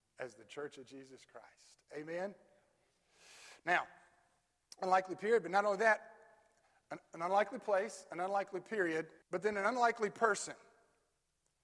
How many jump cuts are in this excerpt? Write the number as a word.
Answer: one